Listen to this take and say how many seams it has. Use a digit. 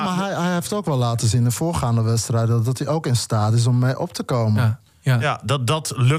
0